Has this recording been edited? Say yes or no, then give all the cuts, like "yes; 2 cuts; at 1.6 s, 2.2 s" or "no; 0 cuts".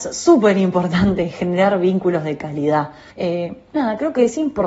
yes; 1 cut; at 3.1 s